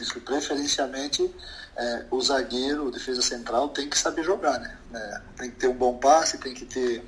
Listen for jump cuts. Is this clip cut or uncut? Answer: cut